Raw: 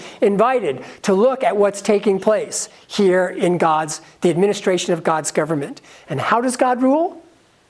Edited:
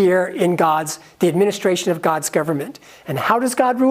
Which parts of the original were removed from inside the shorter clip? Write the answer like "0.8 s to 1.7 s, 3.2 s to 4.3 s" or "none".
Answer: none